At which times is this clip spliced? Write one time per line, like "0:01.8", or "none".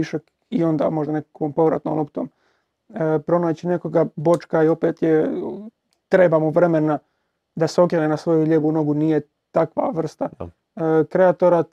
none